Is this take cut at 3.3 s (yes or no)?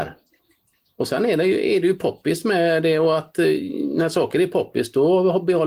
no